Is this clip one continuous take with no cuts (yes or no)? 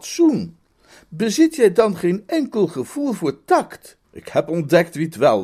no